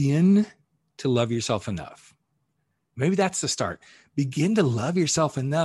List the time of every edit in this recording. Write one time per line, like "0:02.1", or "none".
none

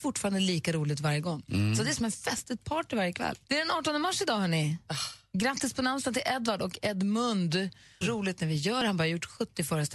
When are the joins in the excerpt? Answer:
0:03.5
0:08.0

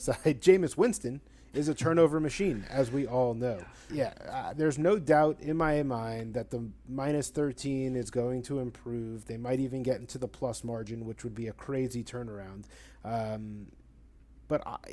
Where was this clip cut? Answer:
0:03.9

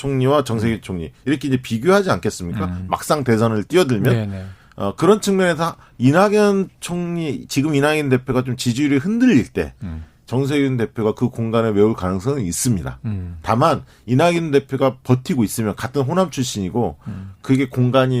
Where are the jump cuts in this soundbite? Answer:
none

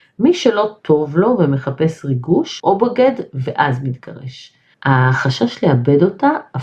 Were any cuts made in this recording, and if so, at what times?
0:02.6
0:04.7

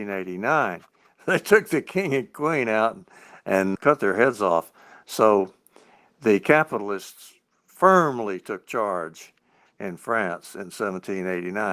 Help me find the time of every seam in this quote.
0:03.8

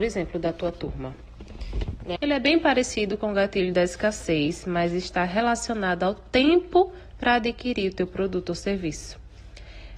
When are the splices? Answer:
0:02.2

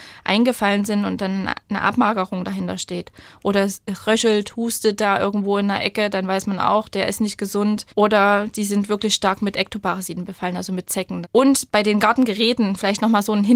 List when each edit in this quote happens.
0:07.9
0:11.2

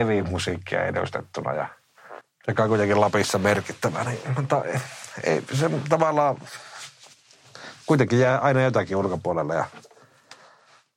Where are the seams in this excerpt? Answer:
none

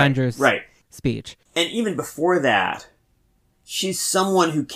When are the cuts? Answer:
none

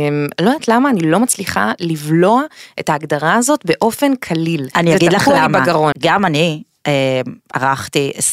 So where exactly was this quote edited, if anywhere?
0:05.9

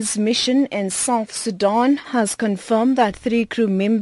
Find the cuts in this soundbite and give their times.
0:02.0

